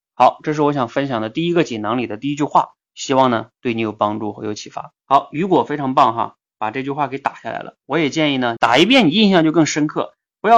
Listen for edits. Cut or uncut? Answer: cut